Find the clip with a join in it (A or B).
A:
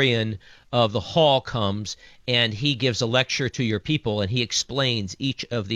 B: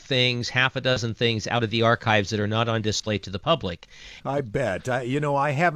B